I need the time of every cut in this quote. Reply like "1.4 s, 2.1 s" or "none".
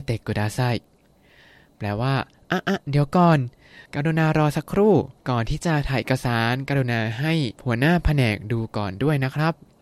3.9 s, 5.2 s, 7.5 s